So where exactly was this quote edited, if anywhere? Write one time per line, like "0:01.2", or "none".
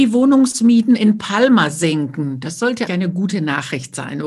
0:02.9